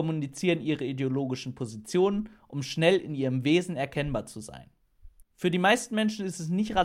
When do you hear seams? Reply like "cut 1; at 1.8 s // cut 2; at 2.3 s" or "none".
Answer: cut 1; at 5.2 s

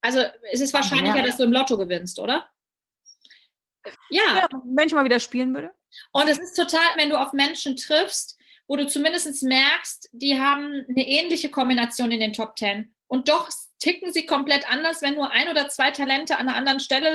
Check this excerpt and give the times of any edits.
cut 1; at 3.9 s // cut 2; at 6.9 s

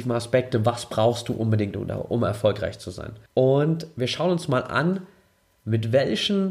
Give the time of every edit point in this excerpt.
cut 1; at 3.3 s

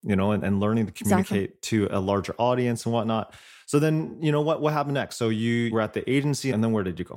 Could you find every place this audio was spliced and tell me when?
none

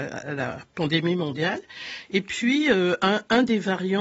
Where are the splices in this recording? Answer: none

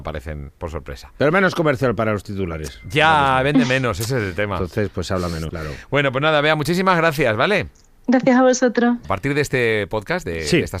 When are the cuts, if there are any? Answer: cut 1; at 5.5 s // cut 2; at 9.0 s

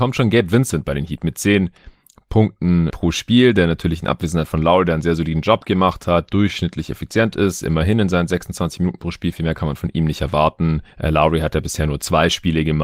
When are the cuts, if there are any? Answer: cut 1; at 2.9 s

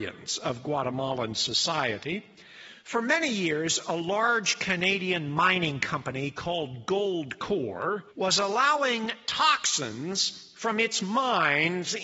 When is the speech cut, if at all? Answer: cut 1; at 2.8 s // cut 2; at 8.1 s

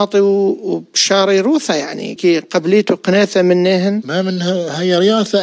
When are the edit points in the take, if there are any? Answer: cut 1; at 2.2 s

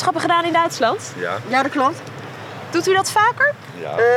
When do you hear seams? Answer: none

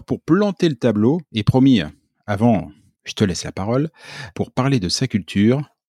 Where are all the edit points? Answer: cut 1; at 2.9 s // cut 2; at 4.3 s

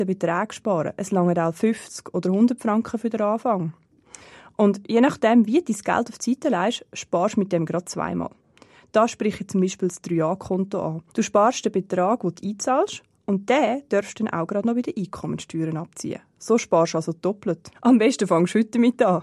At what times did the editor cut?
cut 1; at 11.1 s // cut 2; at 17.7 s

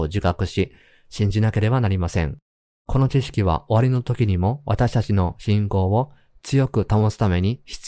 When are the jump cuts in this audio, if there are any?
cut 1; at 2.8 s

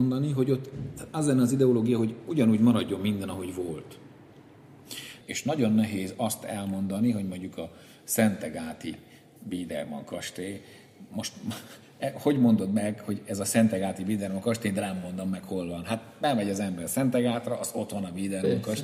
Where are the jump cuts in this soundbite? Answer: cut 1; at 5.2 s

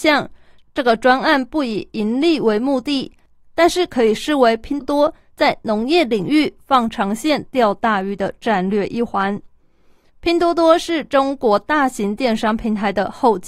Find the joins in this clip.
cut 1; at 4.8 s

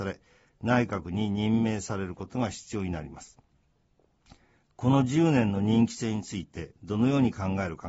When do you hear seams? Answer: none

